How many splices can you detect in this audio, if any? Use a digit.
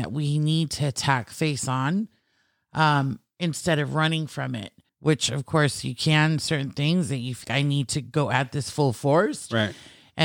2